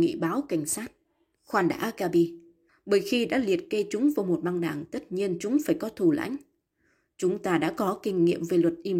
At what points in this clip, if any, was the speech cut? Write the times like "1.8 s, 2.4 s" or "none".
1.3 s, 2.7 s